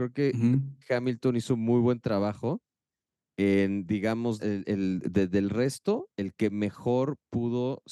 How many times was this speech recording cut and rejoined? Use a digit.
2